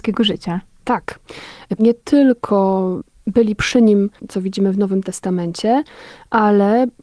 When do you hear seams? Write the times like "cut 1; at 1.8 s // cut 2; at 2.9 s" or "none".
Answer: cut 1; at 1.8 s // cut 2; at 4.2 s